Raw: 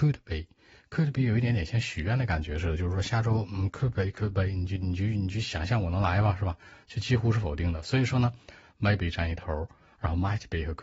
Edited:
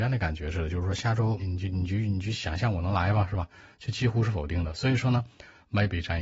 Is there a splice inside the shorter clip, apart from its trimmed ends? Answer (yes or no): yes